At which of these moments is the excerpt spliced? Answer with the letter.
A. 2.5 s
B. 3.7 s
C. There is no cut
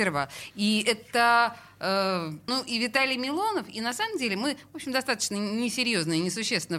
A